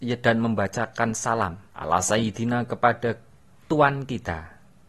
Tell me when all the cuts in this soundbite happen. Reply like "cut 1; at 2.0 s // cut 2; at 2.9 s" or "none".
cut 1; at 1.7 s